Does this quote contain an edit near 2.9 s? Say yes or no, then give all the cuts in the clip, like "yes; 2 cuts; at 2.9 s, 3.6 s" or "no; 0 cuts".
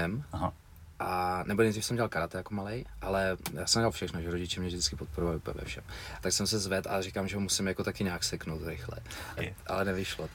no; 2 cuts; at 6.2 s, 9.4 s